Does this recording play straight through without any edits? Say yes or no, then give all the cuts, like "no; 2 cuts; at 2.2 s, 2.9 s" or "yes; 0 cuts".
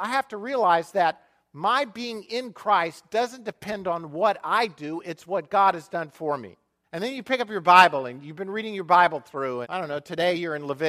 no; 2 cuts; at 6.8 s, 9.6 s